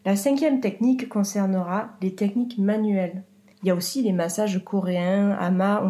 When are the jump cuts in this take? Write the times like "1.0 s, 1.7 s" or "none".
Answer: 3.5 s

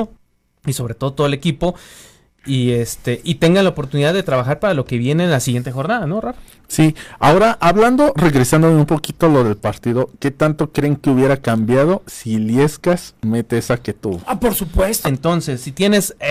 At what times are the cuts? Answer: 15.0 s

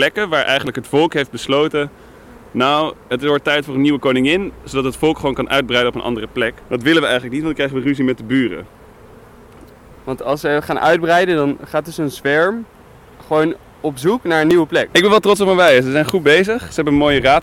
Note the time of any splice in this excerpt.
6.6 s, 14.9 s

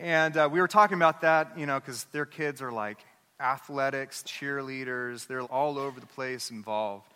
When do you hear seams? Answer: 4.2 s, 5.4 s

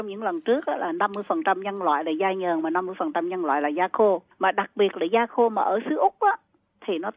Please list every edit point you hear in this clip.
4.3 s

